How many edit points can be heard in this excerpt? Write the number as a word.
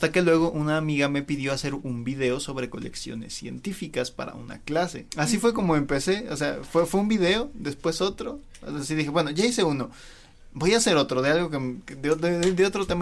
one